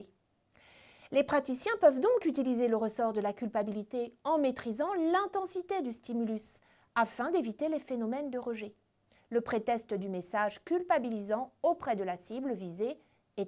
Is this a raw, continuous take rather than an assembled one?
yes; 0 cuts

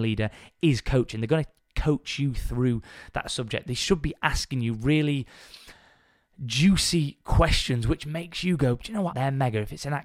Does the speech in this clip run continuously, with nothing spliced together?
no; 1 cut; at 9.1 s

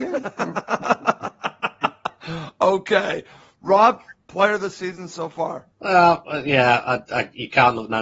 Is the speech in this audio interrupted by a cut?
yes; 1 cut; at 5.7 s

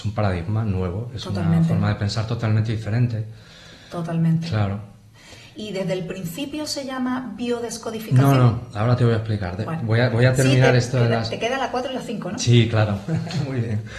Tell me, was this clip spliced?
no; 0 cuts

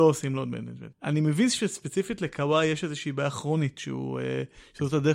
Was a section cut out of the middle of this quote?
yes; 1 cut; at 0.9 s

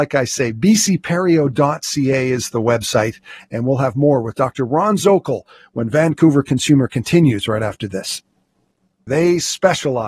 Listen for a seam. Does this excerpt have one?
yes; 1 cut; at 9.1 s

